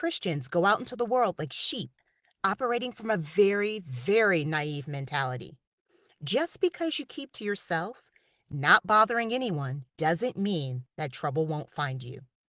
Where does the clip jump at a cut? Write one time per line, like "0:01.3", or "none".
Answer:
0:09.9